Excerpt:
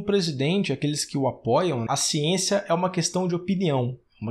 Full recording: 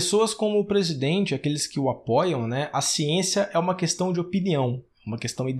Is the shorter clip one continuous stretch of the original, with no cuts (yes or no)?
no